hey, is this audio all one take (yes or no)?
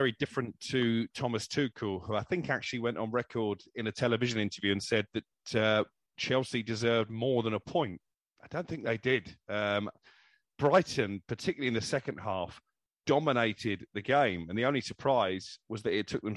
yes